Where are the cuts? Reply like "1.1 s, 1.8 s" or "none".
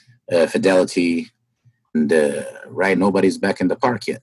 1.8 s, 2.9 s

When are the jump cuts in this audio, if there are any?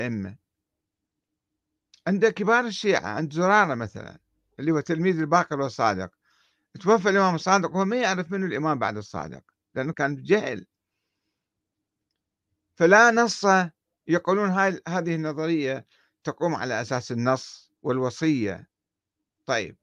9.9 s, 17.8 s

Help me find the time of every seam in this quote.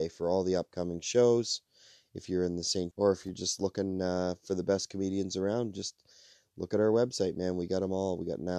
2.9 s

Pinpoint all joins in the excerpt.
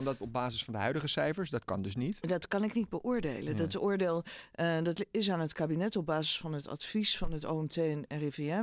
none

